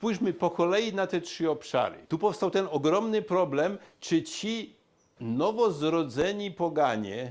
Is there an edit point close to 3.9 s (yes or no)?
no